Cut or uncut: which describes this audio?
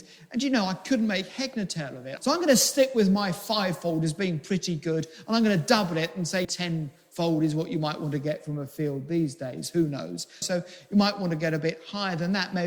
cut